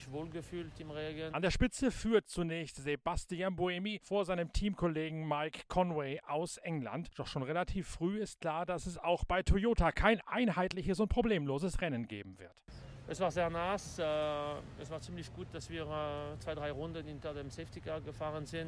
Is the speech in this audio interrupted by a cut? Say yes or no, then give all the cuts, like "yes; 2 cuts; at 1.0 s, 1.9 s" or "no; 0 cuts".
yes; 1 cut; at 1.3 s